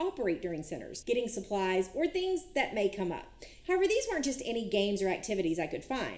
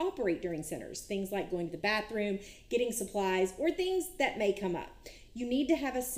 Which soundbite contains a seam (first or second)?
first